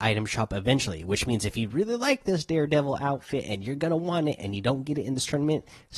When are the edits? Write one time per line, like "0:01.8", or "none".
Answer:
none